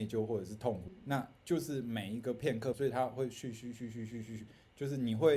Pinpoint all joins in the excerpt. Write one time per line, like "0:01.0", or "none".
0:02.7